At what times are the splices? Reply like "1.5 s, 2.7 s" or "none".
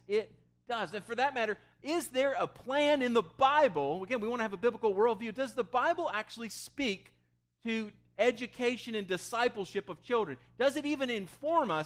0.9 s